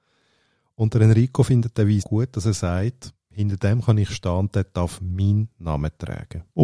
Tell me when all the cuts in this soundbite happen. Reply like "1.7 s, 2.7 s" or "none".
2.0 s